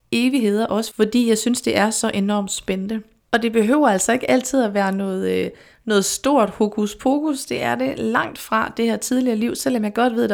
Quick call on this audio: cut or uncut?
cut